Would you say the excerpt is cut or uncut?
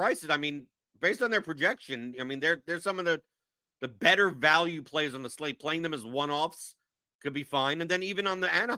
uncut